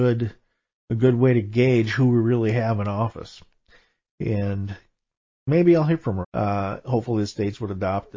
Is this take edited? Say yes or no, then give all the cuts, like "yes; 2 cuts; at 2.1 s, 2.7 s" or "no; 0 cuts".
yes; 1 cut; at 6.2 s